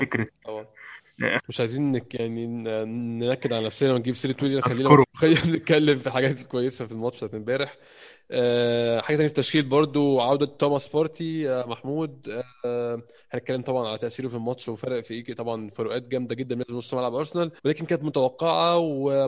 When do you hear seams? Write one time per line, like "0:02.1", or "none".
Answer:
0:01.4
0:05.0
0:17.6